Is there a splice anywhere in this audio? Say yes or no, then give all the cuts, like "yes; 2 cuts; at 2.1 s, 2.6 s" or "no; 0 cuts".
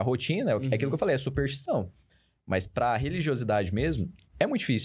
no; 0 cuts